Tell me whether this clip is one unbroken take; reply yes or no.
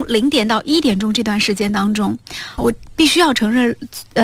no